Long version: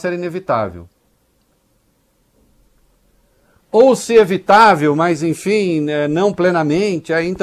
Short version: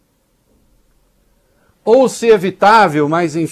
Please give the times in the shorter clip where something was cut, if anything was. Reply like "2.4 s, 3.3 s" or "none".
none